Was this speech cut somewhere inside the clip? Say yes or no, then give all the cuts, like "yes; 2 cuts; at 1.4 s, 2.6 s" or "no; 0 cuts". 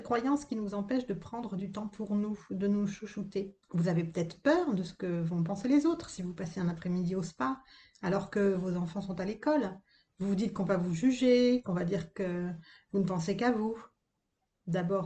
yes; 1 cut; at 3.6 s